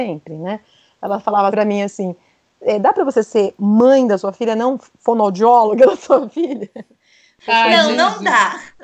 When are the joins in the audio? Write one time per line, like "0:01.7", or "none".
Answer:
0:01.5